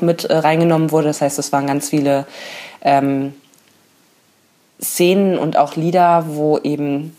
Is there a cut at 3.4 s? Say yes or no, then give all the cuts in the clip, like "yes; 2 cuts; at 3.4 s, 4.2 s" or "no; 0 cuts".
no; 0 cuts